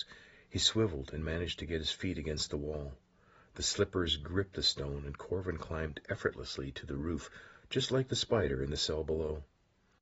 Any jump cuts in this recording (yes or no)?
no